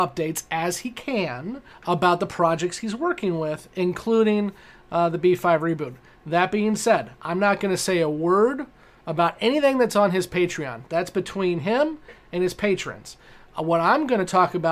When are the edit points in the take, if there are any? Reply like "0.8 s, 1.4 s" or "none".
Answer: none